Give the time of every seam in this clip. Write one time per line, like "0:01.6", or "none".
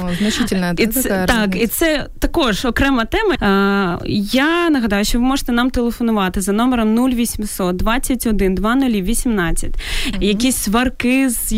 0:03.4
0:10.1